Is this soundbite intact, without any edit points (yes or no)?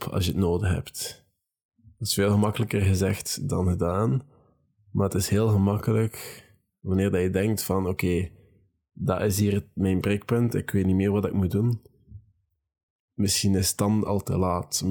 yes